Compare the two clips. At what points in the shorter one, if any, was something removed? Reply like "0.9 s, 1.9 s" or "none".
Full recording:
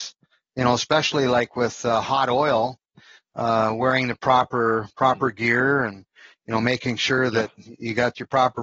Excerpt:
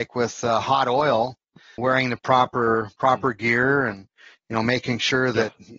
1.8 s